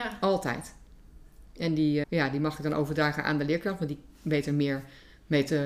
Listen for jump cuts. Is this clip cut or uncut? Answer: cut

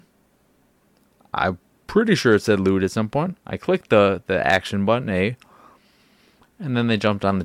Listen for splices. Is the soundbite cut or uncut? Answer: uncut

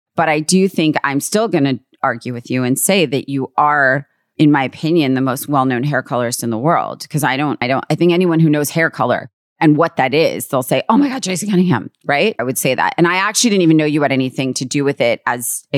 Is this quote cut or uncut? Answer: cut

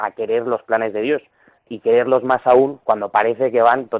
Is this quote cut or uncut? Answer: cut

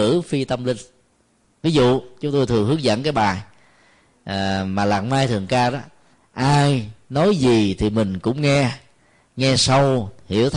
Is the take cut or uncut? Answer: uncut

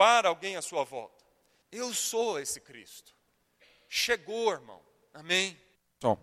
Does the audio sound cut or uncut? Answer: cut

